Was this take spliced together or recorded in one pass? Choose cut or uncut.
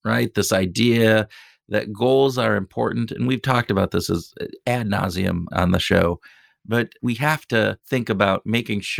cut